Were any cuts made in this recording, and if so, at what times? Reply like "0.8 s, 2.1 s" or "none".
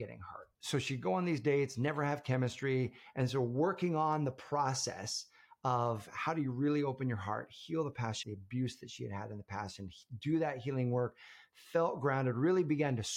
8.2 s